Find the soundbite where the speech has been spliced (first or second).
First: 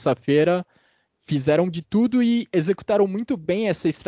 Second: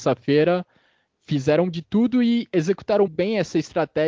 second